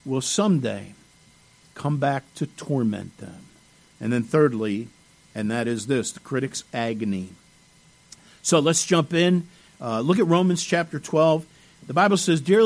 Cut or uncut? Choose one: uncut